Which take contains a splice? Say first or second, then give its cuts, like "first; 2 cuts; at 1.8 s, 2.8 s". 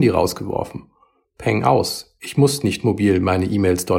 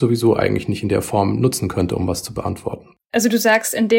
second; 1 cut; at 3.0 s